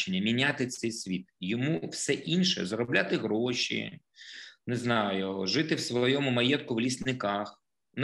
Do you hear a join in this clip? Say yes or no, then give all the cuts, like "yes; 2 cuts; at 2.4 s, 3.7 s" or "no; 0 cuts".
no; 0 cuts